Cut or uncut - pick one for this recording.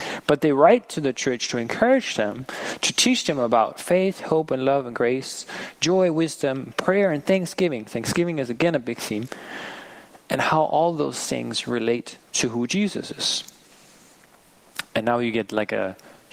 cut